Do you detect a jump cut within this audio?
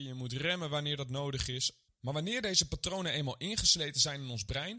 yes; 1 cut; at 1.9 s

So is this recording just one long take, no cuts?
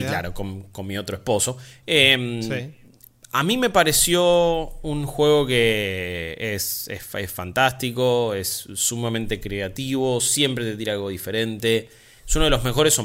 yes; 0 cuts

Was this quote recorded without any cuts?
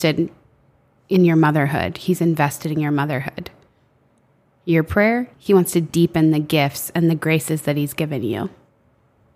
yes; 0 cuts

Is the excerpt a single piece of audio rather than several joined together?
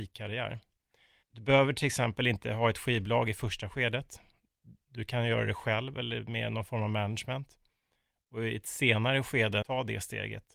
no; 2 cuts; at 1.2 s, 9.6 s

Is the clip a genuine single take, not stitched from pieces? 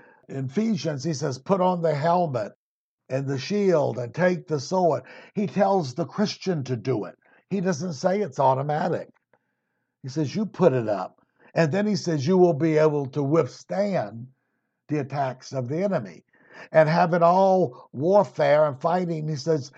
yes; 0 cuts

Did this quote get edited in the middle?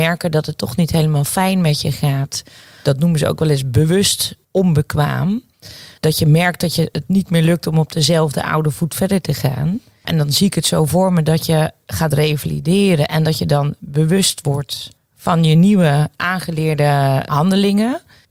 no; 0 cuts

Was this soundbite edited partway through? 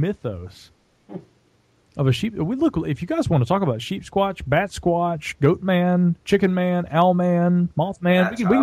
no; 0 cuts

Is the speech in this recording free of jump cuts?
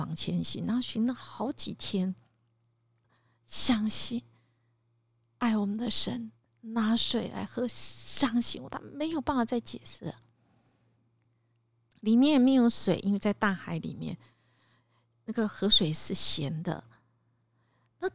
no; 2 cuts; at 3.0 s, 11.9 s

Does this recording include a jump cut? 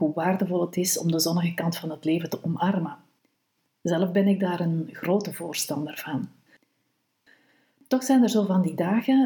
no; 0 cuts

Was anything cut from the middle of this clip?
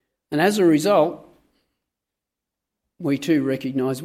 no; 0 cuts

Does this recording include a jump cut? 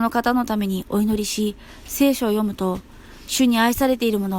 no; 0 cuts

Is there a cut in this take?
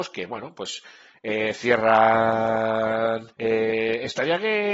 yes; 1 cut; at 3.3 s

